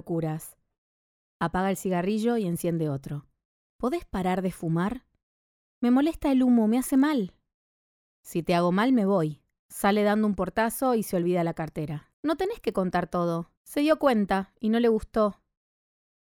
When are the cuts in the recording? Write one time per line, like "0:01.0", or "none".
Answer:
0:09.6
0:12.1
0:13.5

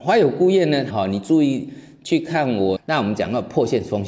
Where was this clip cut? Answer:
0:00.9
0:02.8

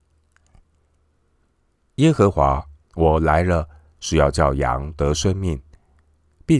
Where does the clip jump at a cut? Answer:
0:02.8

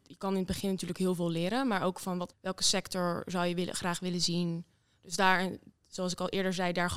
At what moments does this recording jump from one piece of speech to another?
0:02.3

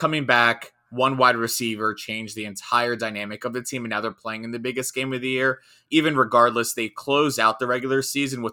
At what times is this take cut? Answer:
none

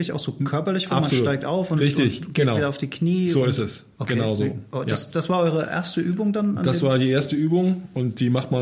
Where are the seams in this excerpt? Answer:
none

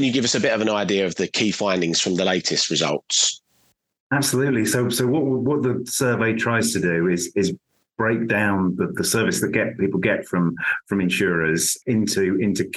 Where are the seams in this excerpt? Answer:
none

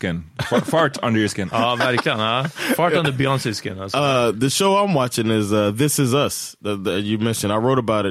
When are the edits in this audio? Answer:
none

